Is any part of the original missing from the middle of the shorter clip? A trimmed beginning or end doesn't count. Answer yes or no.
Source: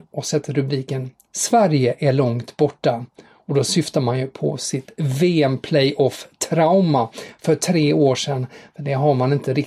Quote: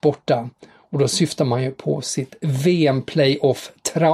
no